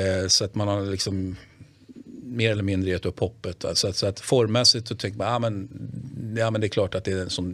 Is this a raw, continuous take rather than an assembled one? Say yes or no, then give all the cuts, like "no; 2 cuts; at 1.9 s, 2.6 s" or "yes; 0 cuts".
yes; 0 cuts